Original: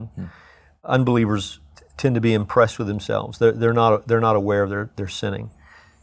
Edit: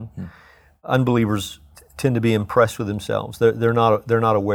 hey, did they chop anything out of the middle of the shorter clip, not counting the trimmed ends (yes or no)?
no